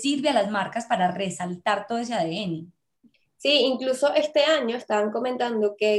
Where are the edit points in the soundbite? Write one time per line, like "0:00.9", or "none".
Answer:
none